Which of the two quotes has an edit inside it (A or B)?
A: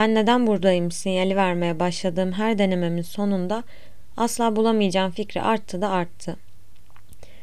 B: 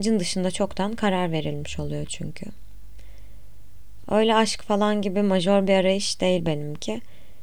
B